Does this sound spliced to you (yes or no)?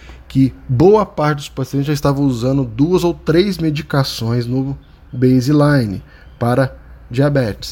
no